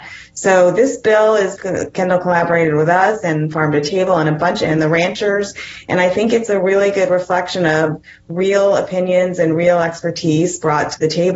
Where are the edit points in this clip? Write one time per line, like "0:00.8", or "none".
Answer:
0:01.6